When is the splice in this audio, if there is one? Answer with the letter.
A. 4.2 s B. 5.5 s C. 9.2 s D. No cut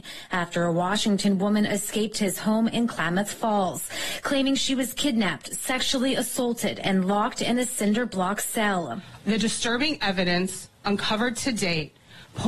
C